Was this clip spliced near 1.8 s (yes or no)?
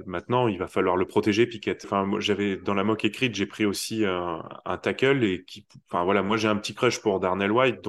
yes